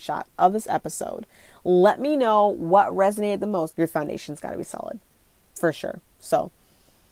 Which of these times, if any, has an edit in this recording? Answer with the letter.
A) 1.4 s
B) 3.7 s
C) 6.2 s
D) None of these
B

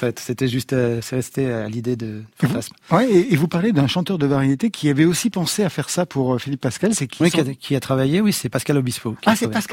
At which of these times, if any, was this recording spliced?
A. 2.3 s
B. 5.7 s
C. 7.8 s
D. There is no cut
A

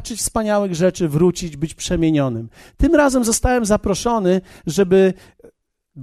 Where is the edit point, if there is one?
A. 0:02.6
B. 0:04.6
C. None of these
C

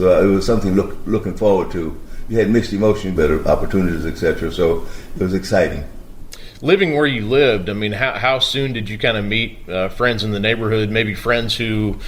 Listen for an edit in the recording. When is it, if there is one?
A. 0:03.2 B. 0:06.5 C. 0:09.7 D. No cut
A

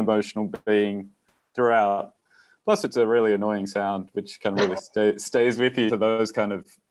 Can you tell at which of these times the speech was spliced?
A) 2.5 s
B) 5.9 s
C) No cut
B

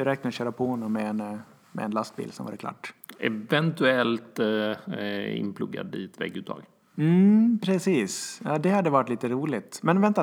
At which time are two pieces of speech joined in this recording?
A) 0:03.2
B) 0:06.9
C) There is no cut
C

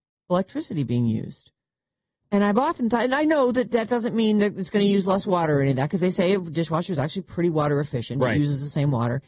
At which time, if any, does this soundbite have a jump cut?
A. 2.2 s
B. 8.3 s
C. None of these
A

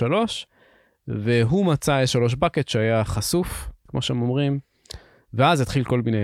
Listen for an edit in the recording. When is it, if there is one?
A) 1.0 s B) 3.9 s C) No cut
B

